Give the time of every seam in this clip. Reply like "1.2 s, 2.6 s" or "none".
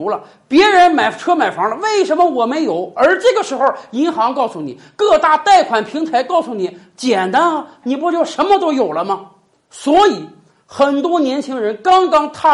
7.8 s